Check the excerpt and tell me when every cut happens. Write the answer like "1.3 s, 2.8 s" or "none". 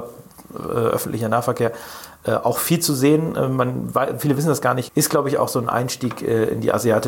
4.9 s